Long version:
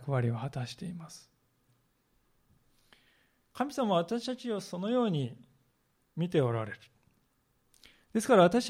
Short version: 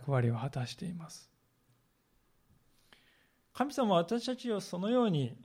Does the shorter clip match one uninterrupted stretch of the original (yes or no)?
yes